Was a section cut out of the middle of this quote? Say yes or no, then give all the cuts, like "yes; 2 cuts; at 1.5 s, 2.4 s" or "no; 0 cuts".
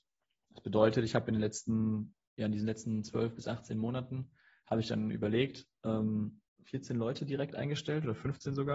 yes; 2 cuts; at 2.4 s, 6.5 s